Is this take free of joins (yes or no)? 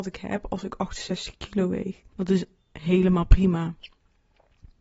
no